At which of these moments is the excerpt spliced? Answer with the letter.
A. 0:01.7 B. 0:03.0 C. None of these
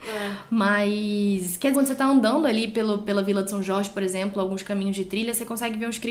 A